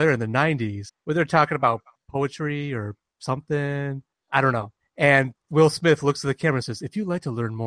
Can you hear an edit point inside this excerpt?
no; 0 cuts

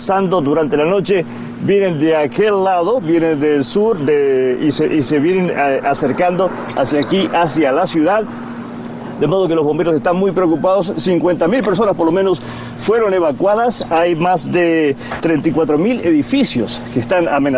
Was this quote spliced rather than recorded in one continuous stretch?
yes; 1 cut; at 15.2 s

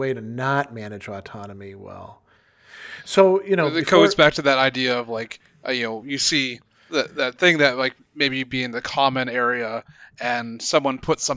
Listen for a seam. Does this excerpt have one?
no; 0 cuts

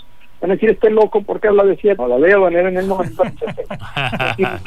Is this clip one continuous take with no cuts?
no; 1 cut; at 2.0 s

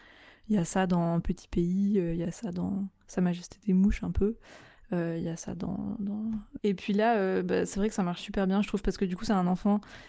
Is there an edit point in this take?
yes; 1 cut; at 6.6 s

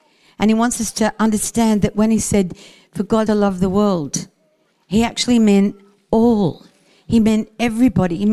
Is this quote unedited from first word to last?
no; 2 cuts; at 3.3 s, 4.7 s

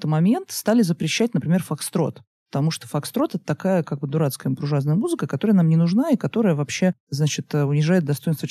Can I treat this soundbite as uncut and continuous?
yes; 0 cuts

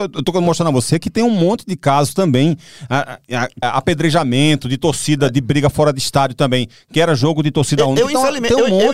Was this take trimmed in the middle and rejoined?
yes; 1 cut; at 3.6 s

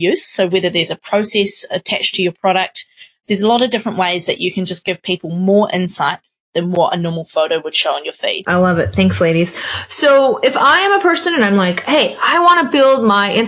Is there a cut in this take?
yes; 1 cut; at 8.4 s

